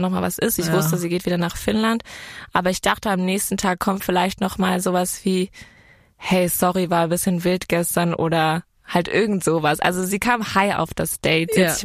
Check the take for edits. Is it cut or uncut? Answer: uncut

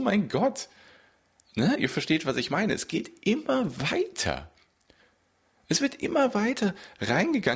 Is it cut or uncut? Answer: uncut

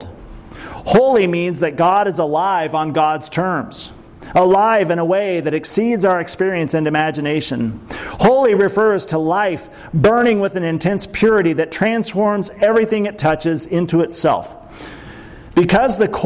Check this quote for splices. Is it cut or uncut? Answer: uncut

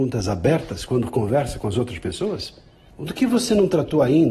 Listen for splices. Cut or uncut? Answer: cut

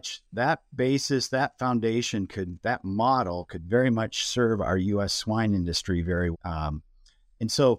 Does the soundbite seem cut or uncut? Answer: cut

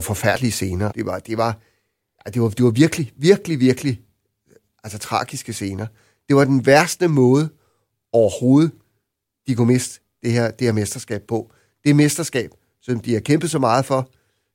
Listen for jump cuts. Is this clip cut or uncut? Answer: cut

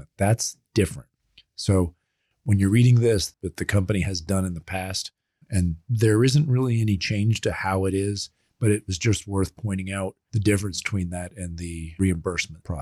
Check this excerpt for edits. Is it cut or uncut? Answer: cut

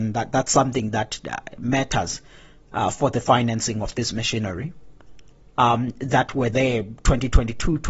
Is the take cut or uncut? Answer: cut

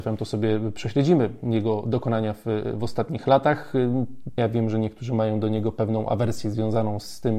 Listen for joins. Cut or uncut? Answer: cut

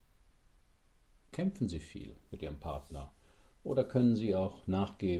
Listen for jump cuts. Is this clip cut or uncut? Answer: uncut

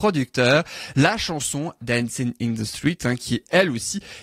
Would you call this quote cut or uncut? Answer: cut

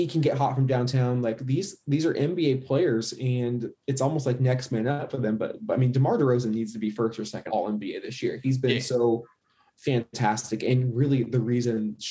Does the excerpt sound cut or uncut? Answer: cut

